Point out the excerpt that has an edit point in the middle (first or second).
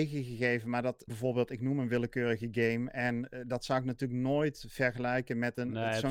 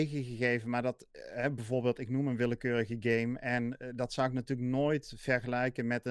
first